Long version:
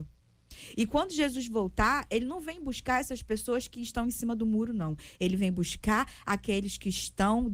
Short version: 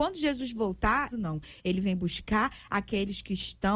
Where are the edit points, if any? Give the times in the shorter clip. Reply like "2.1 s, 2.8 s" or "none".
1.1 s